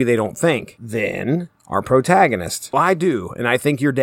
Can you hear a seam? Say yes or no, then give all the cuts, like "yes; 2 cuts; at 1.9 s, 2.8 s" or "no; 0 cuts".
yes; 1 cut; at 2.7 s